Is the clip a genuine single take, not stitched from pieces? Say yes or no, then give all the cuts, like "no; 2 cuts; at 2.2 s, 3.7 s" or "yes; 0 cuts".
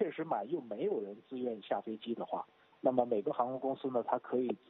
yes; 0 cuts